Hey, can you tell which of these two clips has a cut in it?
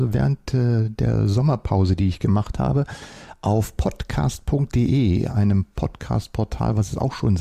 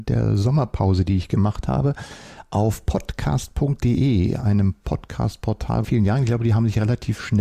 second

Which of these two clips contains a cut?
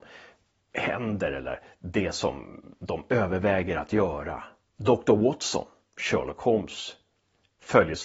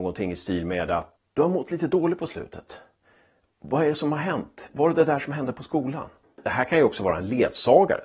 second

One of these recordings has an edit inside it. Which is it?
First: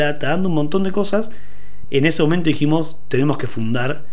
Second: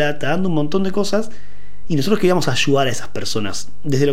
first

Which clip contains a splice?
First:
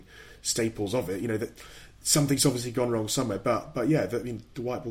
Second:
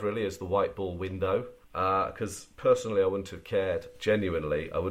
second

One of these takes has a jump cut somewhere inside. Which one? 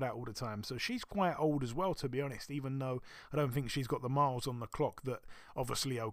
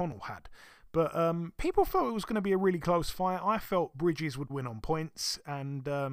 second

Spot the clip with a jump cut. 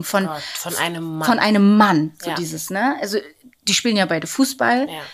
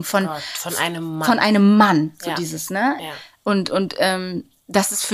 second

